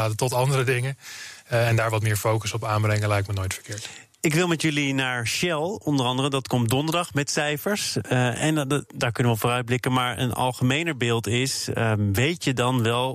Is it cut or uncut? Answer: uncut